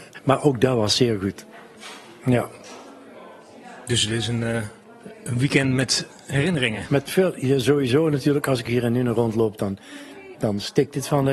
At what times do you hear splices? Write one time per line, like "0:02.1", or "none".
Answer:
0:10.3